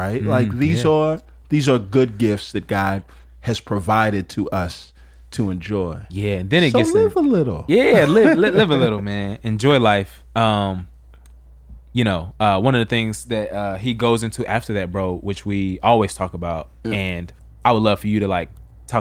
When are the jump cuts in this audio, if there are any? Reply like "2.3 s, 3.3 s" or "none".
none